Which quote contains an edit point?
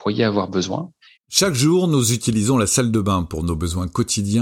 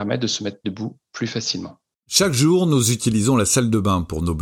first; 1 cut; at 1.2 s

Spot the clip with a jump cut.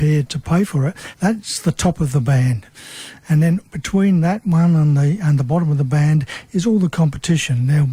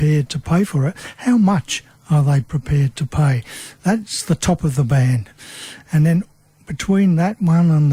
first; 2 cuts; at 1.1 s, 3.6 s

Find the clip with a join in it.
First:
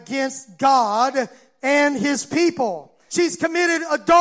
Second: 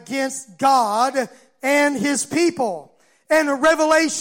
first; 1 cut; at 3.1 s

